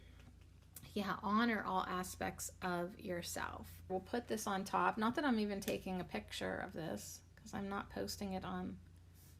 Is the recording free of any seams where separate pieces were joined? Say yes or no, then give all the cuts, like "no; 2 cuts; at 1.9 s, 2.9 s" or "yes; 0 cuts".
no; 2 cuts; at 3.9 s, 7.3 s